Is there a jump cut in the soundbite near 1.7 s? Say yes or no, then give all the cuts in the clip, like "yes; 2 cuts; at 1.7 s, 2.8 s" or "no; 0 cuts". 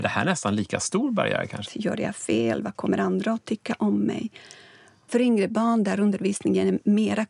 yes; 2 cuts; at 1.7 s, 5.1 s